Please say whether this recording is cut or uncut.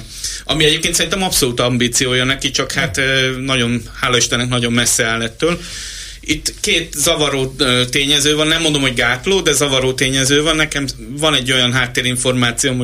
uncut